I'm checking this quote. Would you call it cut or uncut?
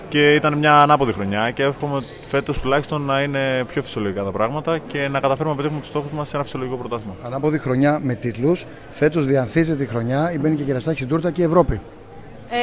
uncut